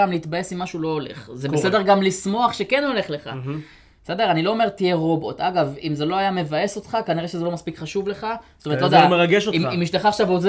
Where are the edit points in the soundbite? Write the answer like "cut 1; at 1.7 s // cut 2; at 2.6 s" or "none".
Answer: none